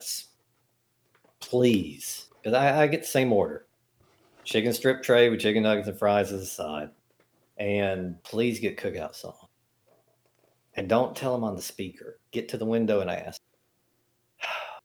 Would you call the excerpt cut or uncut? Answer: cut